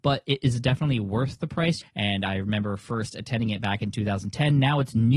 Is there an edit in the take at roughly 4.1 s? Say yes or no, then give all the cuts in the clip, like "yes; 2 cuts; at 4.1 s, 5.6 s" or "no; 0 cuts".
no; 1 cut; at 1.8 s